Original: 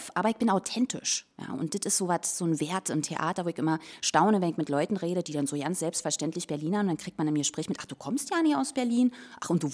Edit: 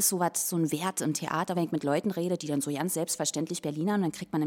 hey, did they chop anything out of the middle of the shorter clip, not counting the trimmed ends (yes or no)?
yes